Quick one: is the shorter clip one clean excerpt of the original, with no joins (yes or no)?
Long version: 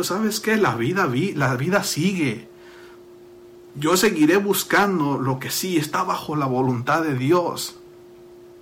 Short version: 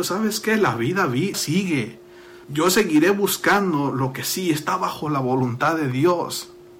no